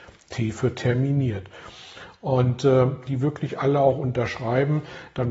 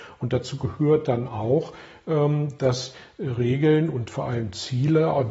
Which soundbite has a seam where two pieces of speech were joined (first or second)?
first